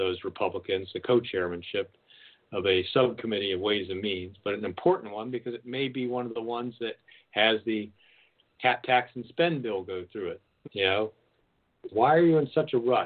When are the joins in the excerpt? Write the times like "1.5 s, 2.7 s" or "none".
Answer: 10.6 s, 11.9 s